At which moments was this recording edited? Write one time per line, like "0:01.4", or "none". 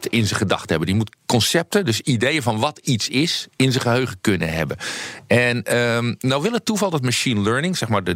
0:01.2

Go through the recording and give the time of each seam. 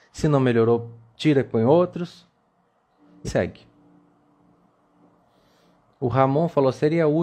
0:03.2

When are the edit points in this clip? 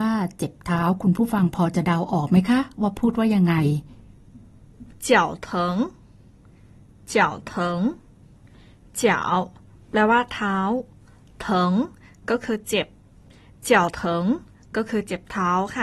0:04.9

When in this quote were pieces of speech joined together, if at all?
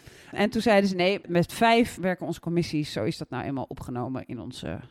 none

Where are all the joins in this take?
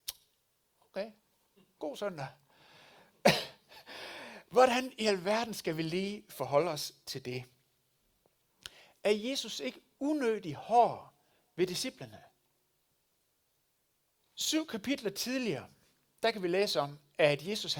0:14.2

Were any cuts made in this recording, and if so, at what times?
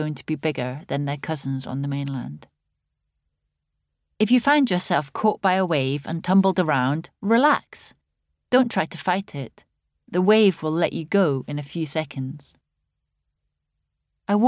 none

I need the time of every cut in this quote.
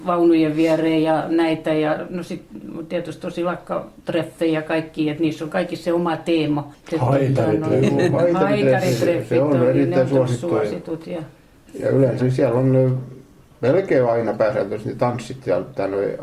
0:12.2

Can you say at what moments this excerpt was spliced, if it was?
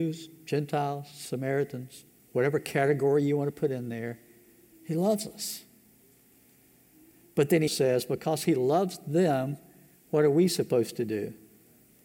0:07.7

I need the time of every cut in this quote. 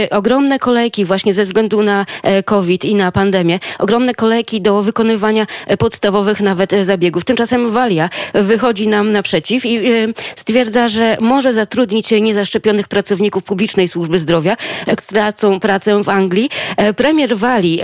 0:15.0

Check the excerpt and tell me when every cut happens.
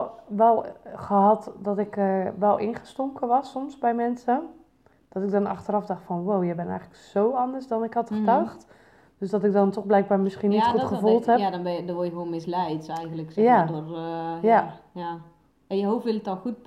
none

